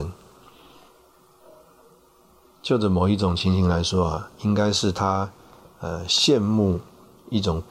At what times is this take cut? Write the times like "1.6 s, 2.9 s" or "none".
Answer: none